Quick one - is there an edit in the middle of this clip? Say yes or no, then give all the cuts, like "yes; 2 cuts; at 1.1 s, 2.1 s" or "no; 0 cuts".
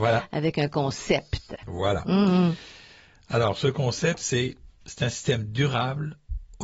no; 0 cuts